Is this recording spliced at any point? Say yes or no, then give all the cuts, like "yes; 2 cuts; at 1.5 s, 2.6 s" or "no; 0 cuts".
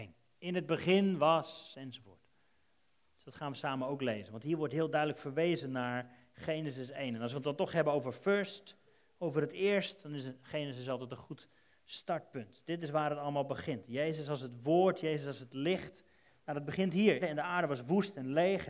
yes; 1 cut; at 17.2 s